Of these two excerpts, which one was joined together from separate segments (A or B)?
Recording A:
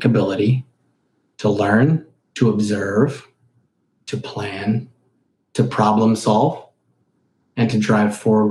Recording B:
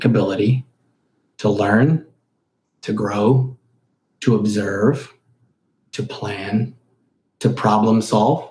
A